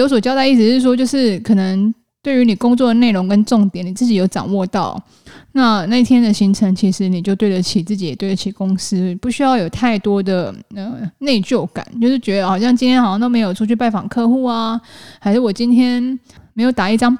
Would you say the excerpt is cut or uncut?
uncut